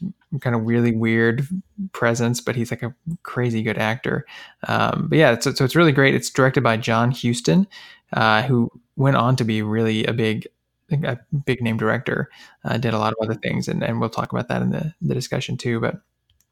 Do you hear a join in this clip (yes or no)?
no